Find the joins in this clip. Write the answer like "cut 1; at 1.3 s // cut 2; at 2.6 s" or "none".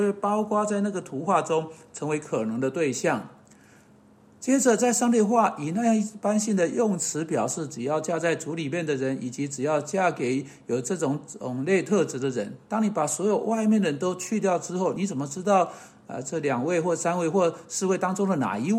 none